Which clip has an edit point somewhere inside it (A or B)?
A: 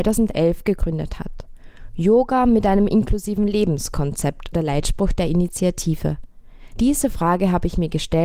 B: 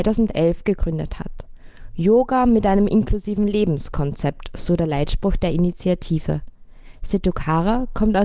A